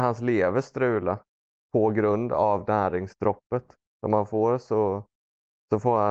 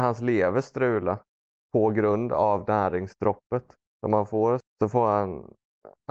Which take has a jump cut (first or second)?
second